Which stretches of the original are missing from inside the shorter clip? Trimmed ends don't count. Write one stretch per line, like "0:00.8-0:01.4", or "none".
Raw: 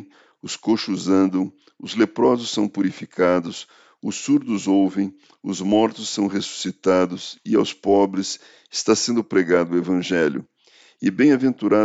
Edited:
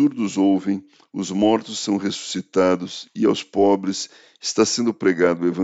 none